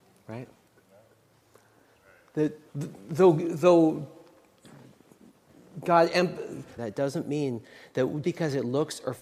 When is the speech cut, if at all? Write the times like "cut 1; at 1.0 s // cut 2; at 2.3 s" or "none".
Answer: cut 1; at 2.7 s // cut 2; at 6.8 s // cut 3; at 8.2 s

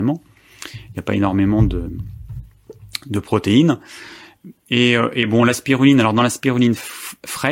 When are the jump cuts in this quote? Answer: none

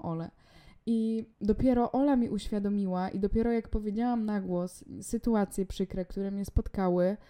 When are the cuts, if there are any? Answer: cut 1; at 1.3 s

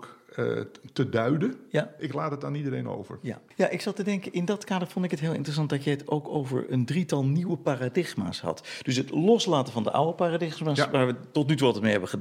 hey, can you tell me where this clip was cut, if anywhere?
cut 1; at 2.0 s

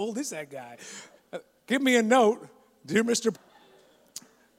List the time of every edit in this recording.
cut 1; at 1.2 s // cut 2; at 3.3 s

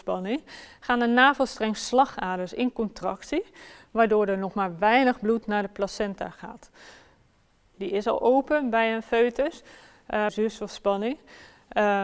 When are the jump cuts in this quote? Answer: cut 1; at 7.7 s // cut 2; at 10.3 s

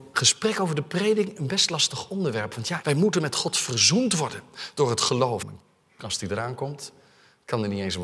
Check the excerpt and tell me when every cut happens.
cut 1; at 2.8 s // cut 2; at 5.4 s

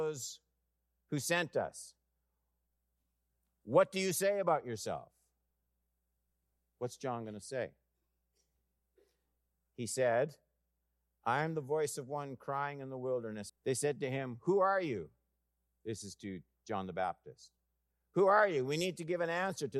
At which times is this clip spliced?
cut 1; at 13.5 s

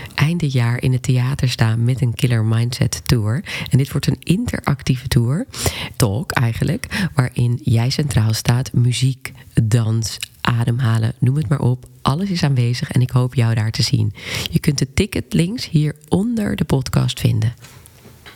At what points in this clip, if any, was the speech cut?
cut 1; at 5.9 s

